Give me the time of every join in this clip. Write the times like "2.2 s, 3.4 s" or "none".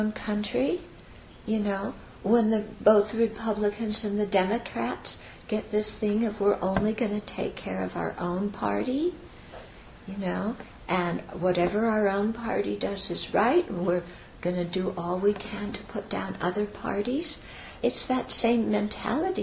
10.8 s, 17.8 s

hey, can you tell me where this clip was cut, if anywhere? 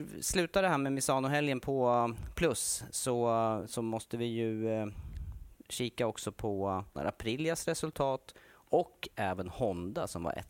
7.0 s

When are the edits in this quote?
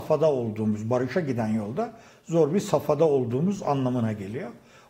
none

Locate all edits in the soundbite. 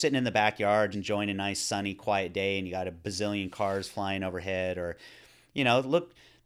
0.9 s

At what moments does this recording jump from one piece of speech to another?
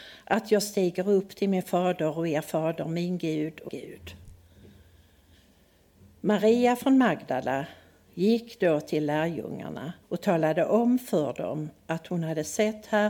3.7 s, 10.0 s

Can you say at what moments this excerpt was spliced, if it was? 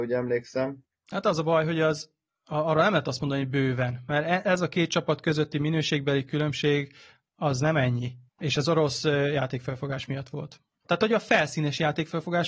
8.3 s, 10.8 s

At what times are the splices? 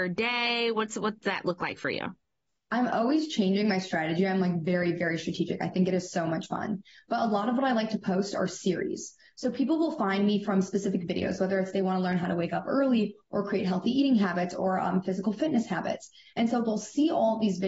none

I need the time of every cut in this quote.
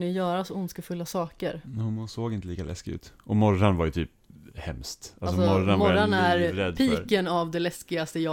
none

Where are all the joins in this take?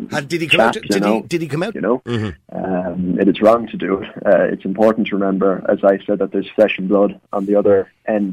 1.7 s

